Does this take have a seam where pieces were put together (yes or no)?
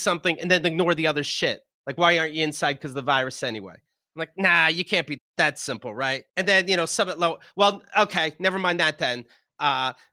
yes